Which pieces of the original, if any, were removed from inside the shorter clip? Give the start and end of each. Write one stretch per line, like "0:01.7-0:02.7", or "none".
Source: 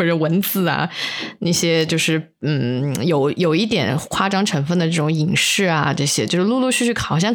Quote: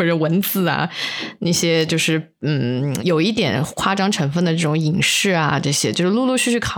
0:03.0-0:03.3

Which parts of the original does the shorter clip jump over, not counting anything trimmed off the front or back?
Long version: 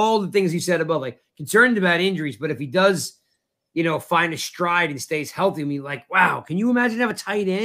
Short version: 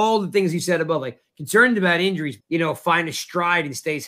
0:02.4-0:03.6

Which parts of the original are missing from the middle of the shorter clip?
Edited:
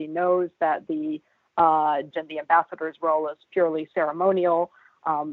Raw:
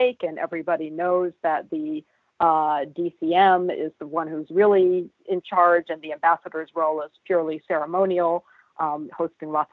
0:02.9-0:05.8

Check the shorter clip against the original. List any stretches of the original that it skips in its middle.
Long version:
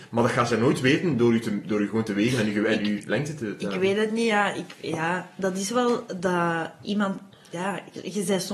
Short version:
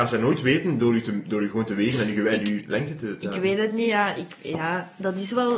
none

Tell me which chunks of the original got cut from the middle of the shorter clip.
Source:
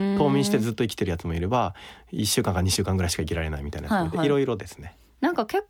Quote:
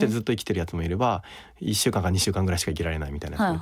none

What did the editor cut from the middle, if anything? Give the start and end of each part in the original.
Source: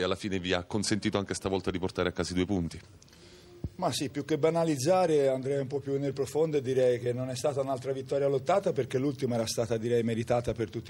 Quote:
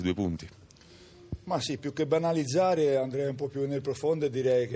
none

